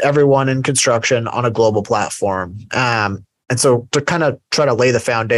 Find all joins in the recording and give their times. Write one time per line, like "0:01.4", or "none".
none